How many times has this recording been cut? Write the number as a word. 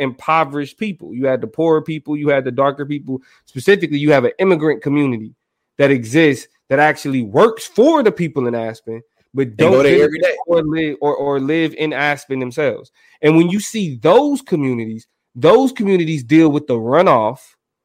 zero